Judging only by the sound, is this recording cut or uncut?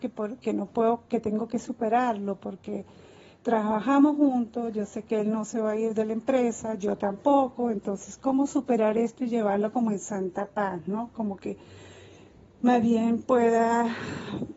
uncut